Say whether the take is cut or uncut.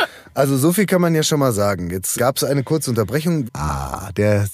cut